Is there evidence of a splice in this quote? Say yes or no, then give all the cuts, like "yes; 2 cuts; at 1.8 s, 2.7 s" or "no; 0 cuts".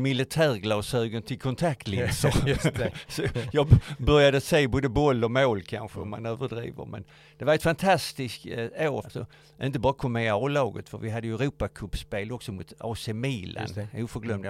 yes; 1 cut; at 9.0 s